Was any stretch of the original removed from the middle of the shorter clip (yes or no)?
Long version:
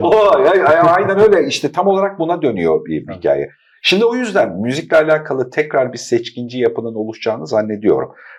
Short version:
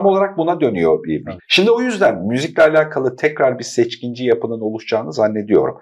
yes